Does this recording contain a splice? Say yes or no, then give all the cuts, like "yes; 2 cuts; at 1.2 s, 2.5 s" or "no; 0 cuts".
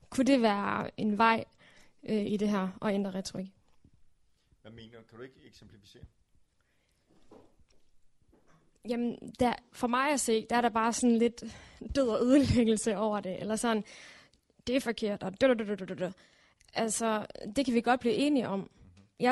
no; 0 cuts